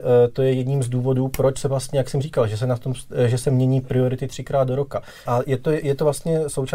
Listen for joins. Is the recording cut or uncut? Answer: cut